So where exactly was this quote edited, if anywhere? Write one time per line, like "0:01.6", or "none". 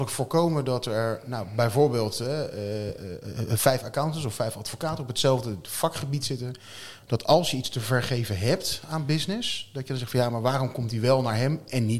none